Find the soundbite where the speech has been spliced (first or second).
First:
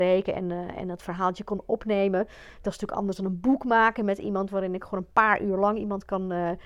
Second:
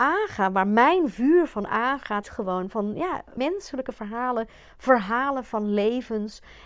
second